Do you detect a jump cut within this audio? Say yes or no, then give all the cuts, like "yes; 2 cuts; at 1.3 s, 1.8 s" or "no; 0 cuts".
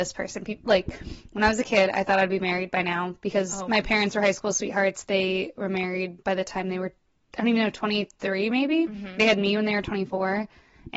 yes; 1 cut; at 6.2 s